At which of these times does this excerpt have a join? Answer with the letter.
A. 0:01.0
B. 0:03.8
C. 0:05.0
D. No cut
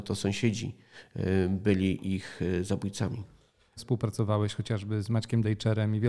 B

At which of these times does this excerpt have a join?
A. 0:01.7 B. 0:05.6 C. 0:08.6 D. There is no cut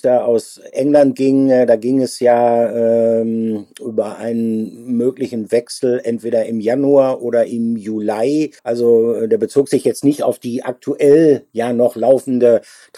C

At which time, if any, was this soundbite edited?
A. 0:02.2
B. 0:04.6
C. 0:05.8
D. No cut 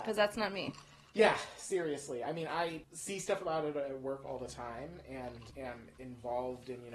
D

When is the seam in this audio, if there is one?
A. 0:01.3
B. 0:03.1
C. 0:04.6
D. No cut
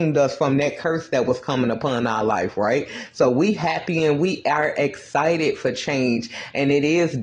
D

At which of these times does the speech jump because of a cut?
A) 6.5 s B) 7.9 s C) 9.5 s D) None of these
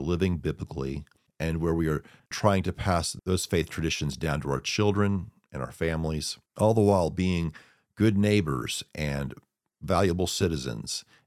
A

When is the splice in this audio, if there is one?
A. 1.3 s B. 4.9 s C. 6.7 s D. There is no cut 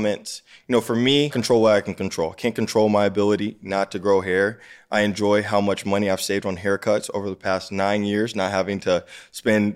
A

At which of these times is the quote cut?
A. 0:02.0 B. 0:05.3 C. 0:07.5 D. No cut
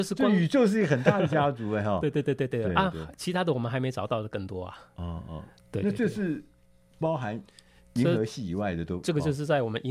D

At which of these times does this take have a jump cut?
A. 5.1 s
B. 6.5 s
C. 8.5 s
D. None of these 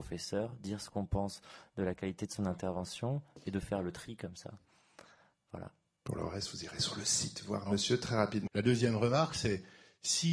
C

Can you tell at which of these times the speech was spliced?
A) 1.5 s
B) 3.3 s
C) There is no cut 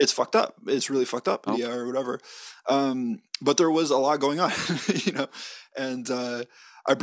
A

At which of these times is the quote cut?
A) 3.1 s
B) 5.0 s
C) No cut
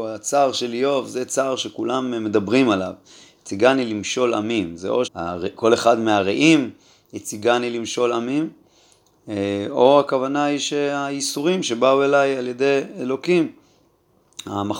B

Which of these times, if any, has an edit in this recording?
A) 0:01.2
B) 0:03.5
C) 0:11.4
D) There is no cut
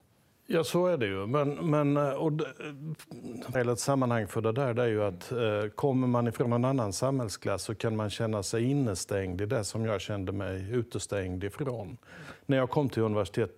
B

